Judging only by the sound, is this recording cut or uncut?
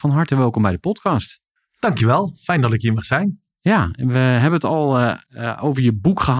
uncut